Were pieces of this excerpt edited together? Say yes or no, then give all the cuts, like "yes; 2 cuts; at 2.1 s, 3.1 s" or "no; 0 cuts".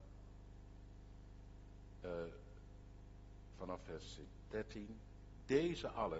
yes; 1 cut; at 3.5 s